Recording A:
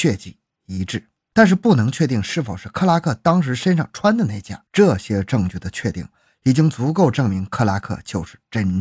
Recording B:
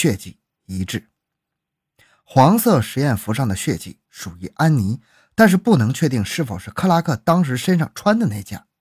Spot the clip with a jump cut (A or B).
A